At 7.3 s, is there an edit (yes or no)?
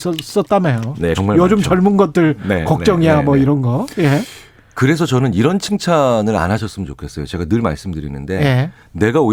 no